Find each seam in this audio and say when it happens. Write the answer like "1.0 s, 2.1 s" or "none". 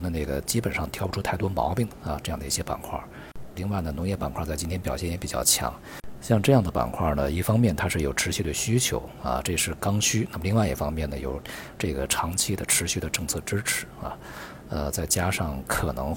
3.5 s